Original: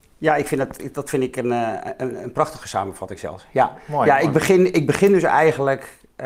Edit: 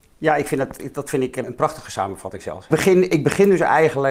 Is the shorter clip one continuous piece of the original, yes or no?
no